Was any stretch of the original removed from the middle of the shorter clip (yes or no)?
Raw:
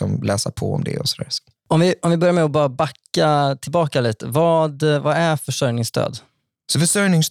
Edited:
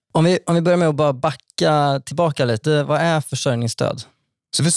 yes